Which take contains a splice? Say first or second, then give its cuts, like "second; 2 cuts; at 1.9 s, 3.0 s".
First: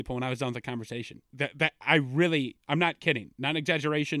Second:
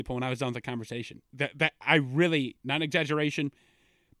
second; 1 cut; at 2.6 s